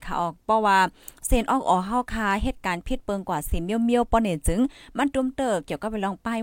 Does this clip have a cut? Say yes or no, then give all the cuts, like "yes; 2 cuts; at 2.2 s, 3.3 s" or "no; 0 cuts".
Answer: yes; 1 cut; at 5.1 s